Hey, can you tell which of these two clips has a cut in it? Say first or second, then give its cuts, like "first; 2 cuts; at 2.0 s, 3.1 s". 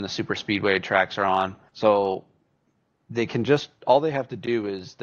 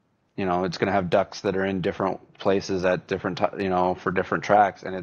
first; 1 cut; at 1.7 s